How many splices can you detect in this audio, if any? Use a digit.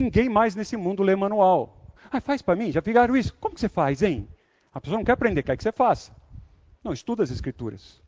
1